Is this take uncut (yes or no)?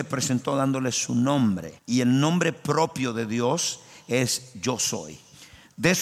no